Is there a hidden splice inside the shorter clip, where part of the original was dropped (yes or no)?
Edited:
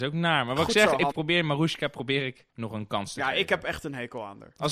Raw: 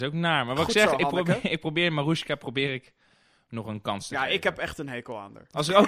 yes